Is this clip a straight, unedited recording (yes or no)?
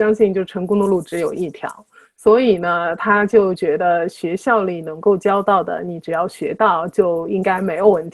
yes